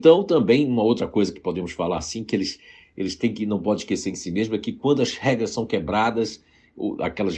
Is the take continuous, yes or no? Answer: yes